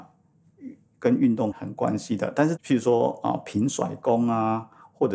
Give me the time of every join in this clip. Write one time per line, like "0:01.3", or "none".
0:01.5
0:02.6